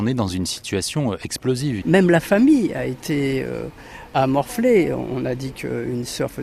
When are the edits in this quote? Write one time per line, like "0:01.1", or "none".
0:01.8